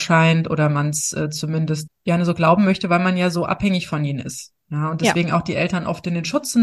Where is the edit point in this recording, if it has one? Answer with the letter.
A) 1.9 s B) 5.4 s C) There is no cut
A